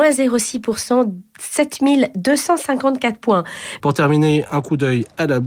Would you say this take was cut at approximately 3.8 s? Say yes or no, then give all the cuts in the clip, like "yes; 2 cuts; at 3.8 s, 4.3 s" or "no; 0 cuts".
yes; 1 cut; at 3.8 s